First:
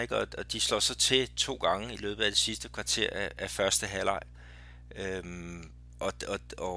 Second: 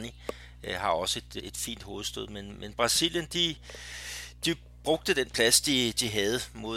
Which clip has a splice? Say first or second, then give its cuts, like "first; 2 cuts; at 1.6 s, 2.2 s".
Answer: second; 1 cut; at 1.4 s